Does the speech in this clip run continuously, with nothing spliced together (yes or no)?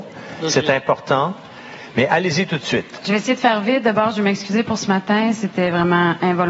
yes